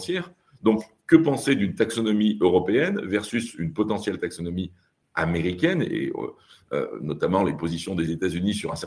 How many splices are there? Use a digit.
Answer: 0